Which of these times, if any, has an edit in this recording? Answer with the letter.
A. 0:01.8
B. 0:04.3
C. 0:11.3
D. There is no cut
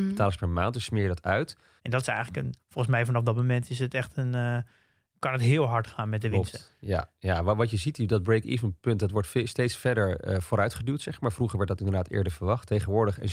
A